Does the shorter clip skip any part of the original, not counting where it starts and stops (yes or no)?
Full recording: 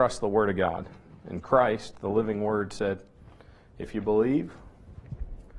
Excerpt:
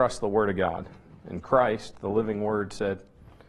no